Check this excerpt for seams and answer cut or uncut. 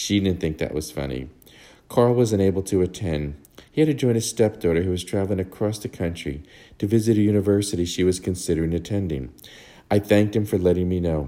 uncut